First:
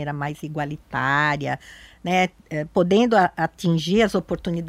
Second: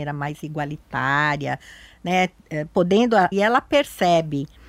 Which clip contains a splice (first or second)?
second